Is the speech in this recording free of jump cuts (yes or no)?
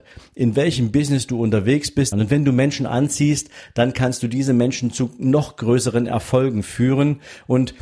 no